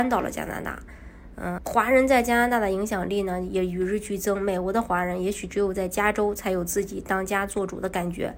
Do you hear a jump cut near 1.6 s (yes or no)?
yes